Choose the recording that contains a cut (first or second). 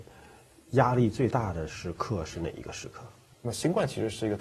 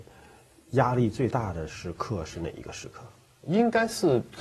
first